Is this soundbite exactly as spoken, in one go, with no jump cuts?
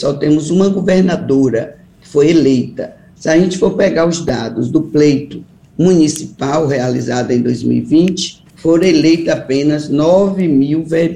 no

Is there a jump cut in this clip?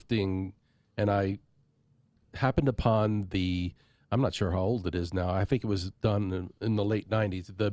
no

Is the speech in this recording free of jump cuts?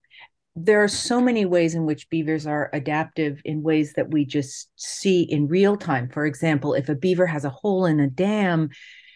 yes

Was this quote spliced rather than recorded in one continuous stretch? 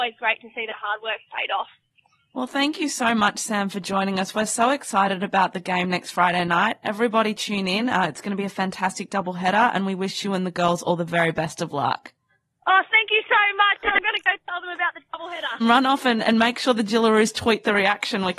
yes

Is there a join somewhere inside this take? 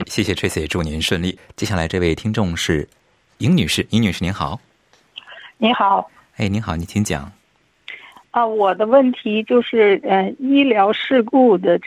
no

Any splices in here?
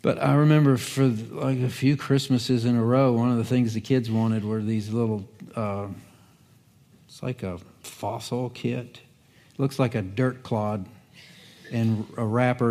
no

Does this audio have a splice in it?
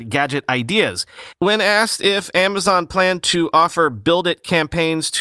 yes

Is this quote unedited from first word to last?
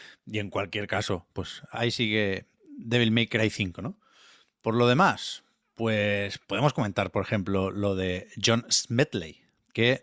yes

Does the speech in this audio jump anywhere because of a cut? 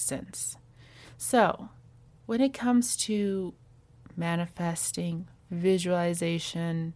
no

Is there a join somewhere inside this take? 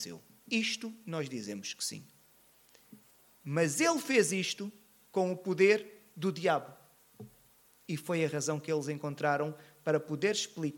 no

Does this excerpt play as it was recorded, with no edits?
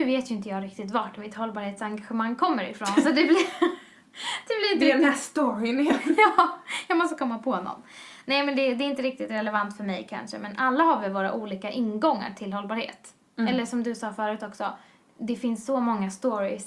yes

